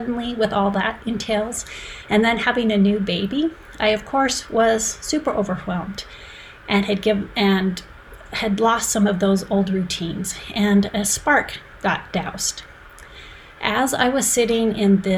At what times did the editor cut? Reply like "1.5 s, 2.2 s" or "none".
none